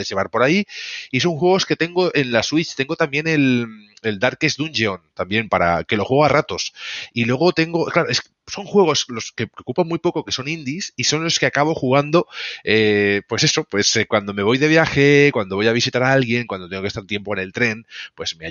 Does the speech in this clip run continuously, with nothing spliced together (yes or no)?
yes